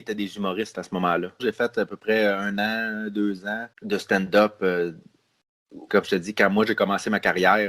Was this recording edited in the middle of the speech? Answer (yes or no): yes